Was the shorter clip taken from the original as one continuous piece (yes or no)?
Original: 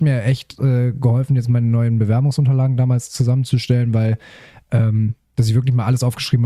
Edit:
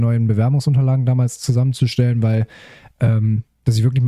yes